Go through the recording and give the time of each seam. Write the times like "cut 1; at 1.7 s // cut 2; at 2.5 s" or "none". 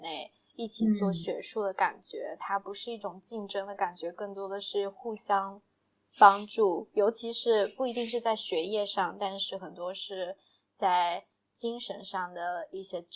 none